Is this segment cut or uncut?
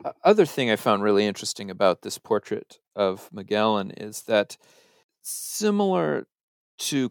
uncut